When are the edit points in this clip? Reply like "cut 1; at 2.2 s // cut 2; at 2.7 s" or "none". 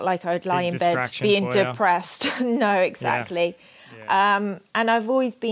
none